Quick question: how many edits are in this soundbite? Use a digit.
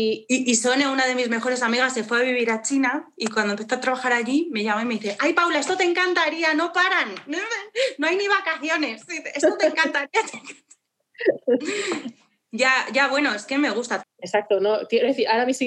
1